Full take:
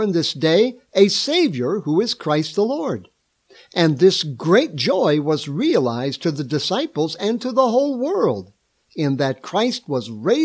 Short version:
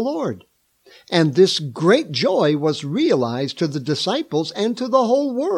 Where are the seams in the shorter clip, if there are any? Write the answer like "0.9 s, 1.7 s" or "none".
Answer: none